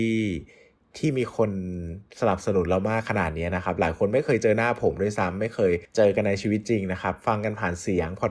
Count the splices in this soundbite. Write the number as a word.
one